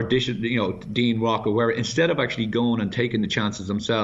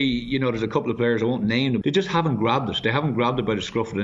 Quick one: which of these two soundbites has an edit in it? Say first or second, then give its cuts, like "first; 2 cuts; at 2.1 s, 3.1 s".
second; 1 cut; at 1.8 s